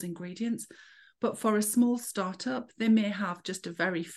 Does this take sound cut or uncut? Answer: uncut